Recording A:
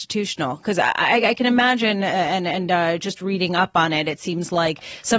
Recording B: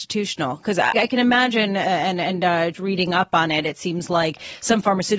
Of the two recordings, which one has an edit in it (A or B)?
B